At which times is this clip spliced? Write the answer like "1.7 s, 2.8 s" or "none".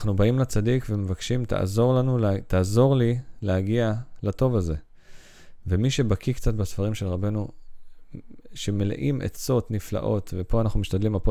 none